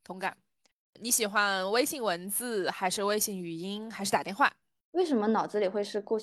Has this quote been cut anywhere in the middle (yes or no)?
yes